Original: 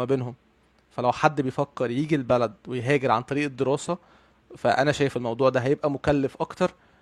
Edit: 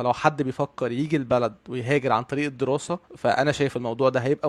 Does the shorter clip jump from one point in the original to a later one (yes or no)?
yes